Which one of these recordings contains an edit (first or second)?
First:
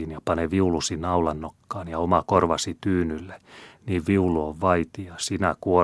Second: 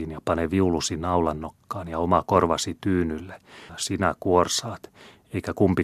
second